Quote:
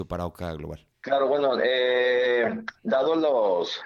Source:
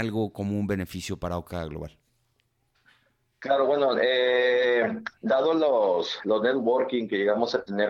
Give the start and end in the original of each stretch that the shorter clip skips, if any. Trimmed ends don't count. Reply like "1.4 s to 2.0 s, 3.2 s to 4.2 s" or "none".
2.0 s to 3.3 s